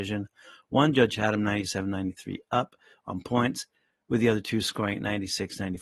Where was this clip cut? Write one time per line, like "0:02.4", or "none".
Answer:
none